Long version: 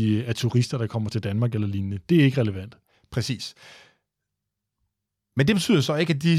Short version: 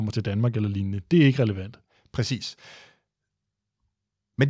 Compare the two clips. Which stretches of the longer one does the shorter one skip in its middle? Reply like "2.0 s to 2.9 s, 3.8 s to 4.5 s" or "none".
none